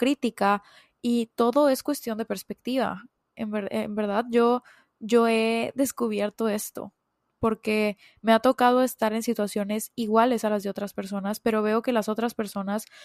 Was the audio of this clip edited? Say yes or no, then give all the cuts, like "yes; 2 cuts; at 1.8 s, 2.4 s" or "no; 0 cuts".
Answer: no; 0 cuts